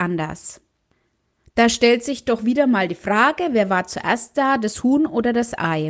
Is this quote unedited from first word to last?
yes; 0 cuts

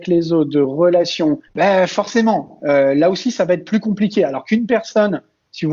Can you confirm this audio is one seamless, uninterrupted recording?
no; 1 cut; at 1.5 s

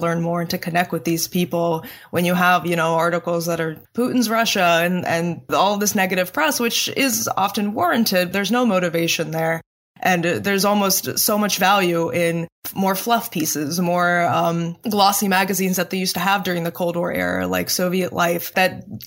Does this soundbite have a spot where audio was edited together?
yes; 1 cut; at 8.3 s

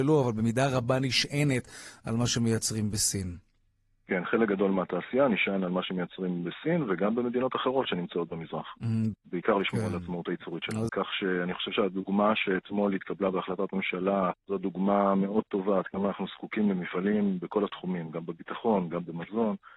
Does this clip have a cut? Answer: yes; 3 cuts; at 9.1 s, 10.9 s, 14.3 s

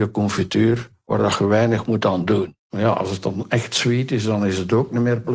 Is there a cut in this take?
yes; 1 cut; at 2.7 s

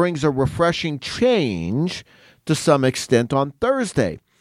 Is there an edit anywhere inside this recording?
no; 0 cuts

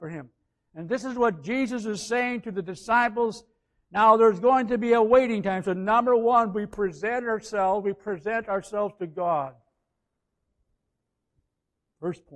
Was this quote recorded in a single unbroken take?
yes; 0 cuts

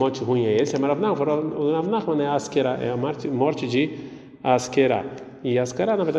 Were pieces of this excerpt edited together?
no; 0 cuts

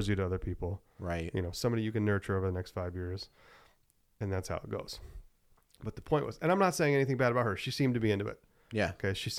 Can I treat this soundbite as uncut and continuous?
yes; 0 cuts

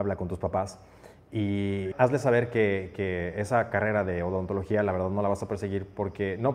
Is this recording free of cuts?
no; 1 cut; at 1.9 s

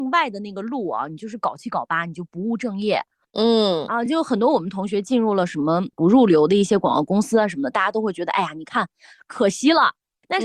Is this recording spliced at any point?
no; 0 cuts

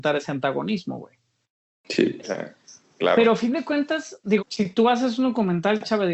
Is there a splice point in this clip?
yes; 2 cuts; at 2.2 s, 4.4 s

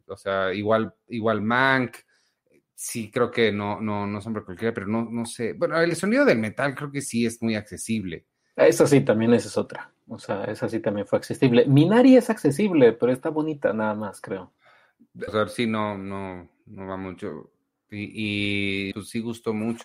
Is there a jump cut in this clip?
yes; 2 cuts; at 15.3 s, 18.9 s

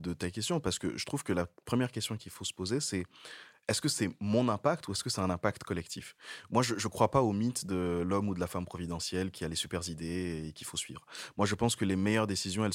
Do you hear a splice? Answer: no; 0 cuts

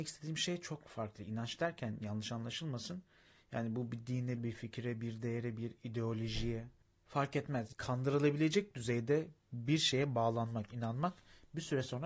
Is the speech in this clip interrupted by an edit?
yes; 1 cut; at 4.4 s

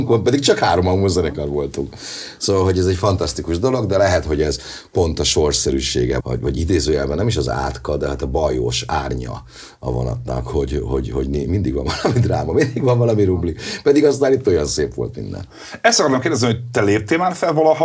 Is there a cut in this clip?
yes; 1 cut; at 6.2 s

